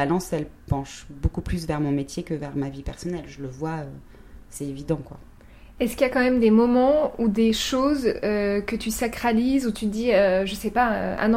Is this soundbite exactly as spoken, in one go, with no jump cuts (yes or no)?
yes